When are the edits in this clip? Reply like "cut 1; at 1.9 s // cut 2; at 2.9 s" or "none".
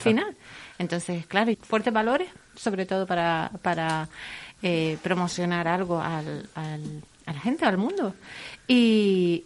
cut 1; at 1.5 s // cut 2; at 7.1 s